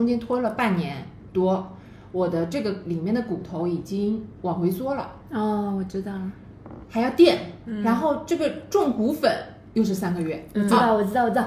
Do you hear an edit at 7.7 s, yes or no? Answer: yes